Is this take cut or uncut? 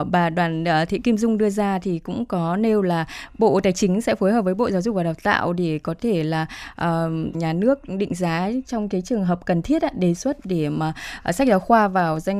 cut